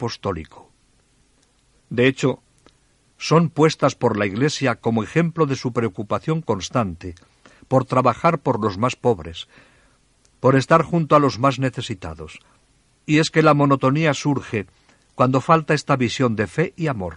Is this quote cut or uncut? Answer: cut